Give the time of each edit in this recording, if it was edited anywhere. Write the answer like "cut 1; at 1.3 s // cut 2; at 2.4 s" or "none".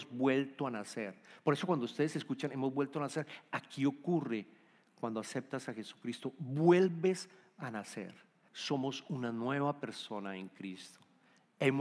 cut 1; at 8.5 s

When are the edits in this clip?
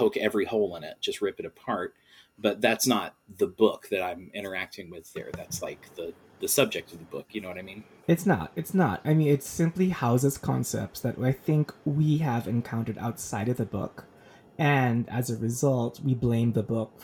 none

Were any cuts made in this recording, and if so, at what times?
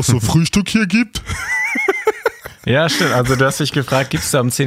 none

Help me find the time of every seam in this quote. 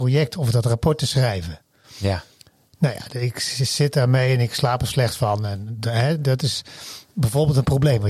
none

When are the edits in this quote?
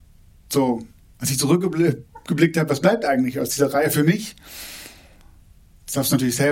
none

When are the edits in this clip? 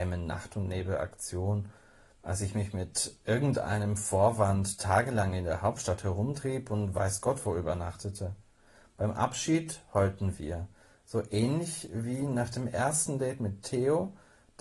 none

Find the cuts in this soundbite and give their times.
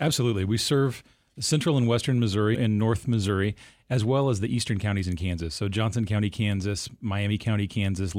cut 1; at 2.5 s

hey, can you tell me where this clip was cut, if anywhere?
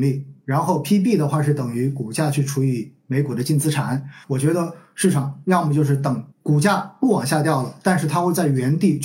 cut 1; at 4.2 s // cut 2; at 6.3 s

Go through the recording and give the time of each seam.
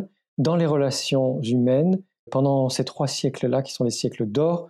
cut 1; at 2.3 s

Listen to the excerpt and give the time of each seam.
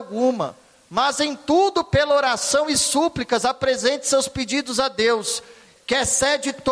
cut 1; at 5.8 s

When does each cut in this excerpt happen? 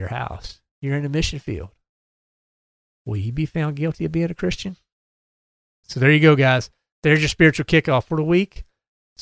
cut 1; at 5.8 s

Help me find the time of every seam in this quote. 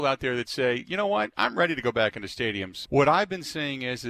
cut 1; at 2.8 s

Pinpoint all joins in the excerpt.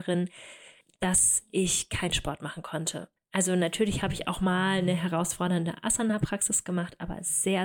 cut 1; at 3.2 s

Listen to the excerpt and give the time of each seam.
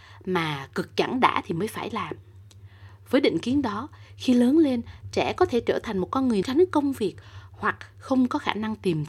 cut 1; at 6.4 s

